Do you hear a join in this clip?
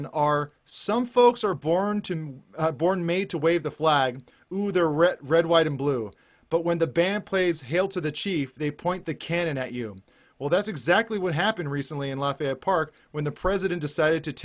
no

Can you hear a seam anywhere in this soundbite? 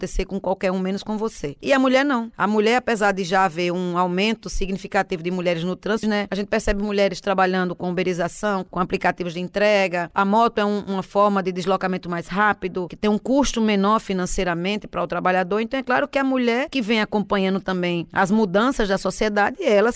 yes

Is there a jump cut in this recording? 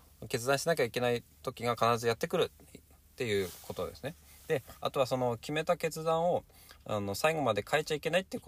no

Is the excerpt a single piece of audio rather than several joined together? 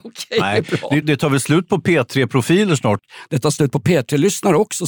no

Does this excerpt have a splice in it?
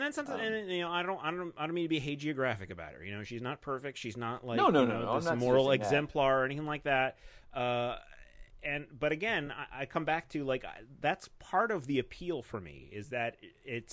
no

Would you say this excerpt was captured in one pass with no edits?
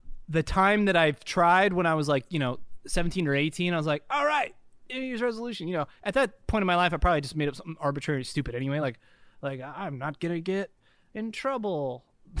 yes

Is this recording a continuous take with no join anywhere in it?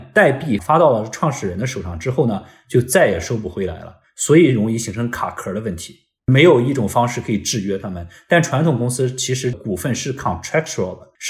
yes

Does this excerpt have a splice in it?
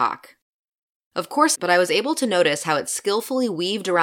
yes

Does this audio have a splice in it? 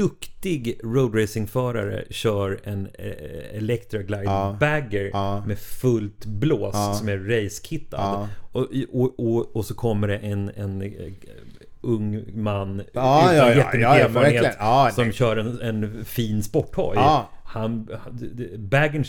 no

